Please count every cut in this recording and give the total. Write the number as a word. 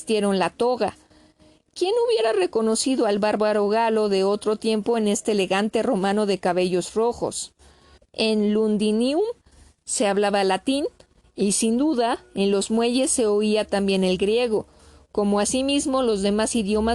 one